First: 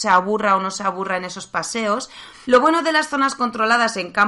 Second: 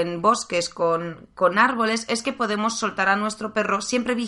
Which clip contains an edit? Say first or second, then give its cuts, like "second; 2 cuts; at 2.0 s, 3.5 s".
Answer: first; 1 cut; at 2.4 s